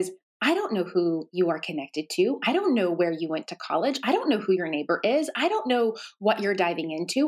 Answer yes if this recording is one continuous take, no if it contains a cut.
yes